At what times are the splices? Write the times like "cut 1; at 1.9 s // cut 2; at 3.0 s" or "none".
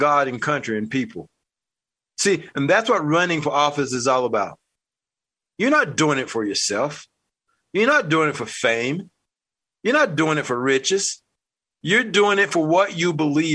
cut 1; at 11.7 s